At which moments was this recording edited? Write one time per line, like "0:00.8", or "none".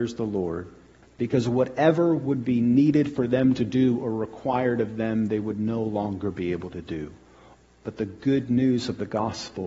0:01.0
0:07.6